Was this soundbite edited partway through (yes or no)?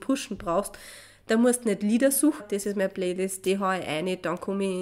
yes